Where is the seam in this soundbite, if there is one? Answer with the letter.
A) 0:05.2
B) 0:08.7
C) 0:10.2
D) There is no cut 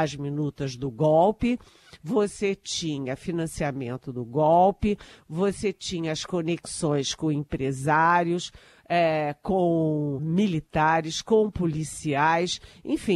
C